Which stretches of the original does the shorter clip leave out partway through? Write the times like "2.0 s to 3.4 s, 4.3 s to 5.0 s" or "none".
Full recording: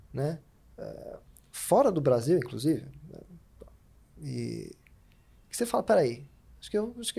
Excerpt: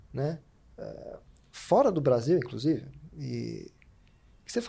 3.1 s to 4.1 s